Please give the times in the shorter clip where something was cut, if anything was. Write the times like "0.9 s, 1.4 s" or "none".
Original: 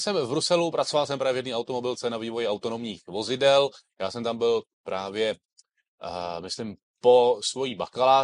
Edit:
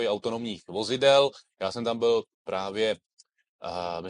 none

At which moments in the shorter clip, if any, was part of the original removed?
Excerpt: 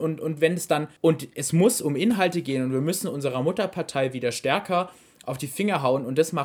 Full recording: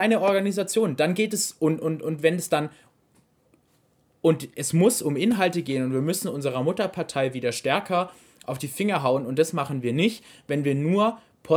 1.0 s

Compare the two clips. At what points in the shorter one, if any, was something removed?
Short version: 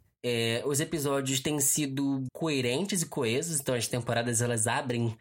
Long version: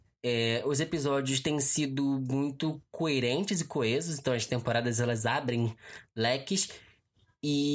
2.3 s

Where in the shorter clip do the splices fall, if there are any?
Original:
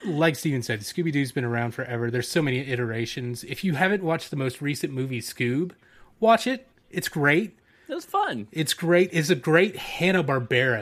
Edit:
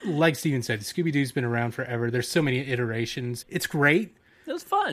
3.4 s

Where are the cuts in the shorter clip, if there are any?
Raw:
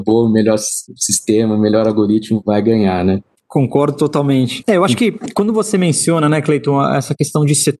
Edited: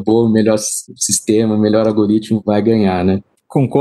none

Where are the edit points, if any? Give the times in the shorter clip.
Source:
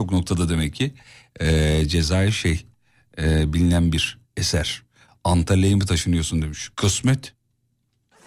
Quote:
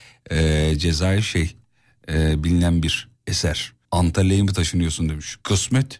3.8 s

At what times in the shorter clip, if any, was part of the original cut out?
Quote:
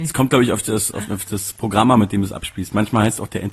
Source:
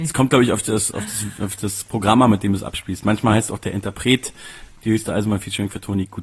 1.1 s

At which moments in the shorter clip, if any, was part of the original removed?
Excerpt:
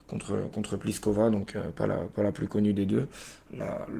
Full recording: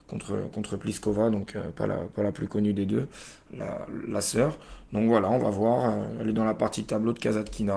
none

